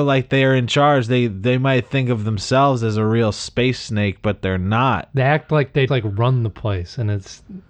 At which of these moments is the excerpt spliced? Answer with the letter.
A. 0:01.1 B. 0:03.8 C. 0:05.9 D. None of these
C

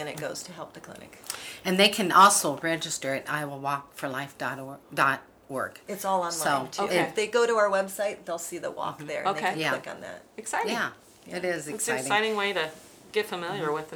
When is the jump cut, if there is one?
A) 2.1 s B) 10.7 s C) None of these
C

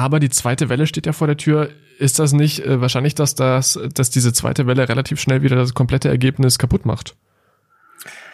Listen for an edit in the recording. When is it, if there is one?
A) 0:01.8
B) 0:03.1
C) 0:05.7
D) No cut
D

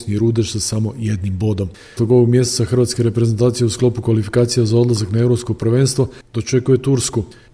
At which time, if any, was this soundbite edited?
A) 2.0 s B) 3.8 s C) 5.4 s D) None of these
A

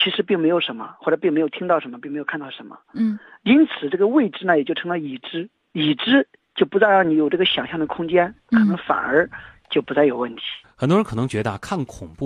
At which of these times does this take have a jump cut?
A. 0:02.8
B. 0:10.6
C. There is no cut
B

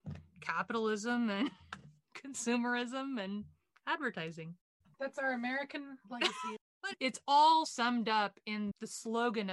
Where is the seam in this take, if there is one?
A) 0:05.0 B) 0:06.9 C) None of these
B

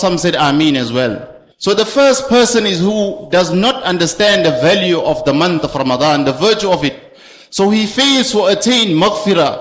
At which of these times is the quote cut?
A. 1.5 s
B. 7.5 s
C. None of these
A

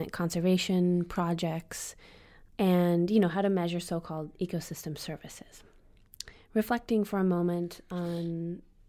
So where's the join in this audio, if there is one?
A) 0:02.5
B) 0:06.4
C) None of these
A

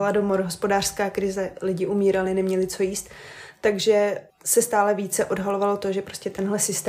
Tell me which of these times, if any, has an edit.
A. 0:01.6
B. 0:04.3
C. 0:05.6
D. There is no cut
B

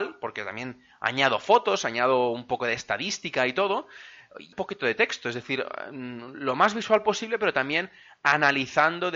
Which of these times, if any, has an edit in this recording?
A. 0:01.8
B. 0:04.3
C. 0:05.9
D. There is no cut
D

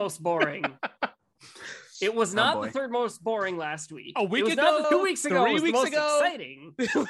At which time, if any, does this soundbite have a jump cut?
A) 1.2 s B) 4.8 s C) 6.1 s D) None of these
B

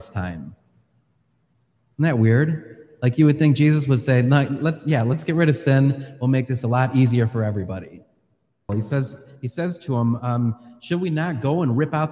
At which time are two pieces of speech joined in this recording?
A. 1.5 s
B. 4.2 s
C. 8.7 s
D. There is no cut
C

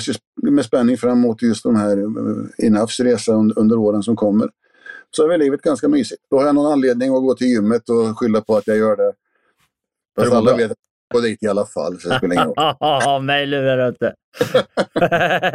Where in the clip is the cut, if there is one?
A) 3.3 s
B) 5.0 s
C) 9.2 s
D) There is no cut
B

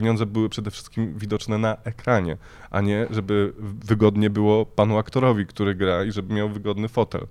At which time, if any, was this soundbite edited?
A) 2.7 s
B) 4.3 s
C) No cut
C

